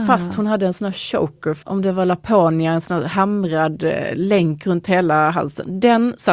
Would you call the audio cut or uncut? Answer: cut